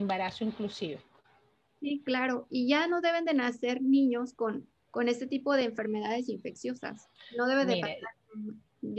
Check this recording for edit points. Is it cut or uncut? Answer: uncut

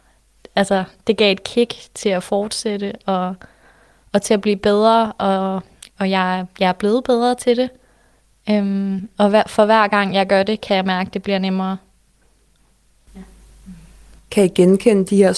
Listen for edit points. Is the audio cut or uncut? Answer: cut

